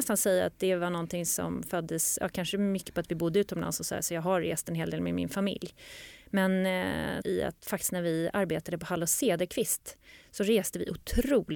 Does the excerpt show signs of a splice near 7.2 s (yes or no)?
yes